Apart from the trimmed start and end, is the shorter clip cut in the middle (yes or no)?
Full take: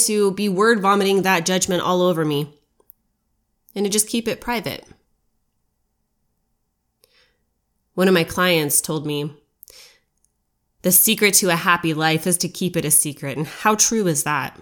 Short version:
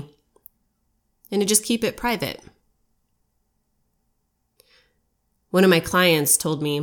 no